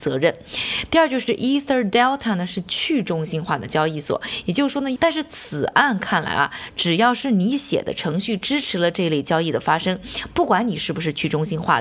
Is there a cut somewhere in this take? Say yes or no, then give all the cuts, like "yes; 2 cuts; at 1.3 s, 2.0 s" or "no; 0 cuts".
yes; 1 cut; at 5.0 s